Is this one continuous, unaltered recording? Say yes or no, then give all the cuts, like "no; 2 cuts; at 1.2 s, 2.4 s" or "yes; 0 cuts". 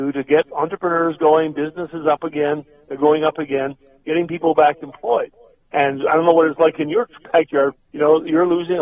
no; 2 cuts; at 5.6 s, 7.7 s